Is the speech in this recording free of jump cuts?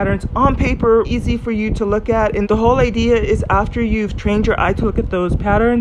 no; 2 cuts; at 1.0 s, 2.4 s

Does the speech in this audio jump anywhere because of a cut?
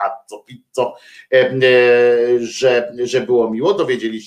no; 0 cuts

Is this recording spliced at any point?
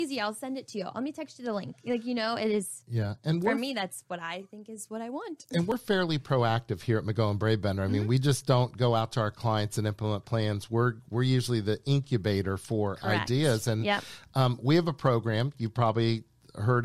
no; 0 cuts

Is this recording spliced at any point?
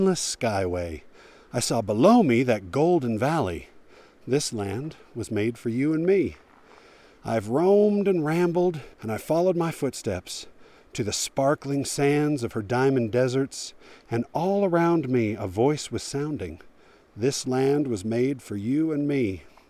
yes; 1 cut; at 8.9 s

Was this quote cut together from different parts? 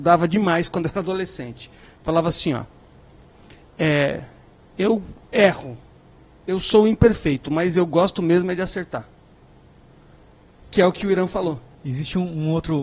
no; 0 cuts

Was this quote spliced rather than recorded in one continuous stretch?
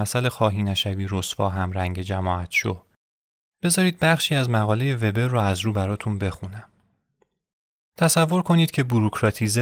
no; 0 cuts

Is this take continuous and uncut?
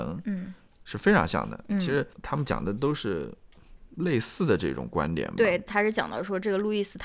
no; 2 cuts; at 2.1 s, 5.7 s

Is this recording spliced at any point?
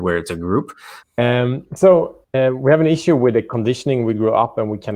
yes; 2 cuts; at 1.0 s, 2.2 s

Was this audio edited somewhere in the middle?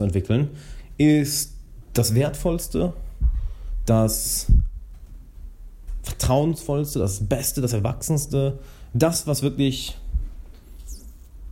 no; 0 cuts

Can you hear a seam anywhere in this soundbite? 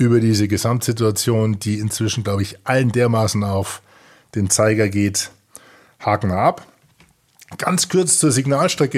no; 0 cuts

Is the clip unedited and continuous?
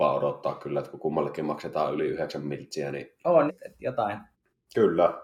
no; 1 cut; at 3.5 s

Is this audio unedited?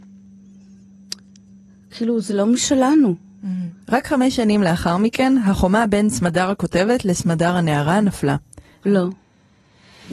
no; 2 cuts; at 3.8 s, 8.8 s

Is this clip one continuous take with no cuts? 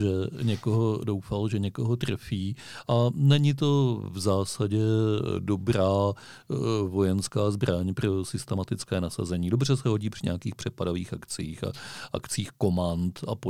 yes; 0 cuts

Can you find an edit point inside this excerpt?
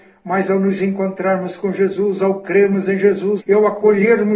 yes; 1 cut; at 3.4 s

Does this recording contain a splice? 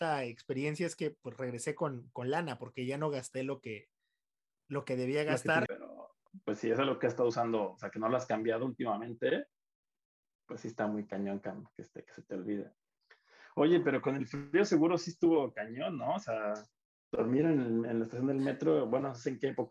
yes; 1 cut; at 5.7 s

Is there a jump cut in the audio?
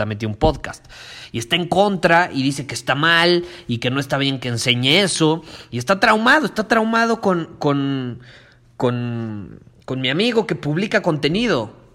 no; 0 cuts

